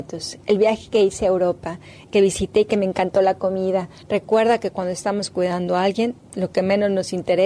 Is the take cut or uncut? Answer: cut